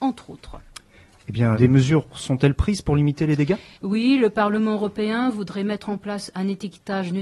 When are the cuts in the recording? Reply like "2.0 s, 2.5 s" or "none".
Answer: 1.5 s, 3.7 s